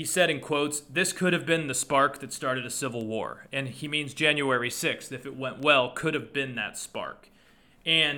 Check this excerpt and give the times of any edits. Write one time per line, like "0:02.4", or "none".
none